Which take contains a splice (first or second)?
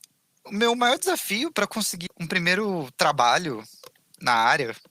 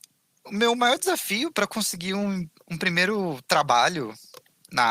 first